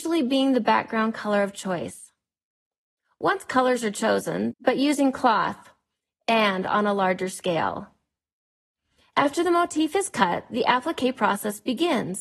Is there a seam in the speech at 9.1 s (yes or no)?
no